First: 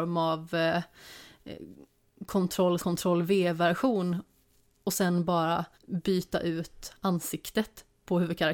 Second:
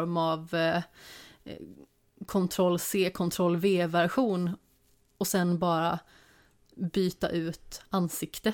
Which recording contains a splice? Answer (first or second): first